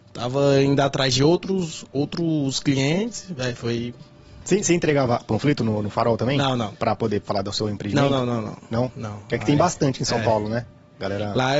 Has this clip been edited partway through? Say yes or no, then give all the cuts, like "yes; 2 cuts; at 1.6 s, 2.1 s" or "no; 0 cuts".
yes; 1 cut; at 6.7 s